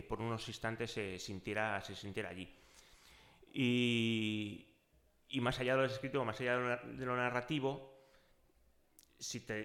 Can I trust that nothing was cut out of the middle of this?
yes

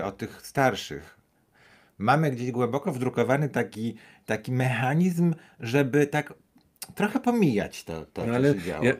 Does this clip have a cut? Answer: no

